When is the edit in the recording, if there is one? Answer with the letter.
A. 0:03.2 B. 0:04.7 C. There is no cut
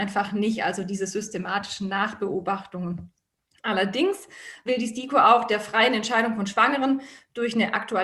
B